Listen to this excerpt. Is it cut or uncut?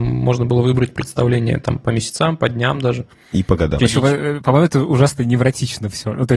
cut